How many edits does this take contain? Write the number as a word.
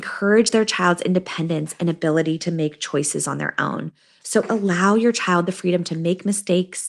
zero